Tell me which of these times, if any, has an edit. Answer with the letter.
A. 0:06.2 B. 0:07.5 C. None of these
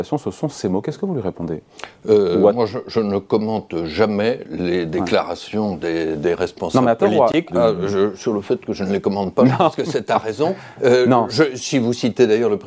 B